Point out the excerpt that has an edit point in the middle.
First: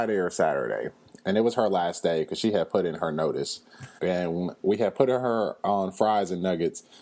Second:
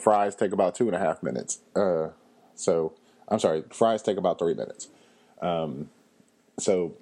first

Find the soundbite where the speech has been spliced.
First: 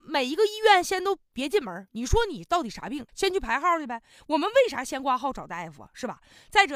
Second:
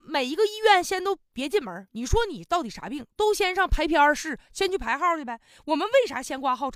first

